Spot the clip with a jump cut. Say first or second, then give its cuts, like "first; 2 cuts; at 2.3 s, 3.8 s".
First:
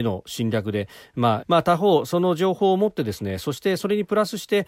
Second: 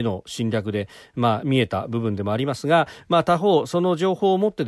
first; 1 cut; at 1.4 s